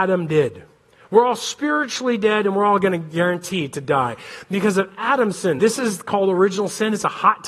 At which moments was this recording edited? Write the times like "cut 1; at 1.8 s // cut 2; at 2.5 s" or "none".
cut 1; at 5.6 s